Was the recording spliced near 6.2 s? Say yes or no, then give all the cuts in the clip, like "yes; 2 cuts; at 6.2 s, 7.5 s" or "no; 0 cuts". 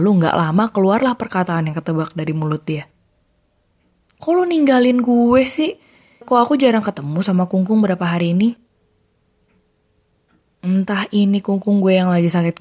yes; 1 cut; at 6.2 s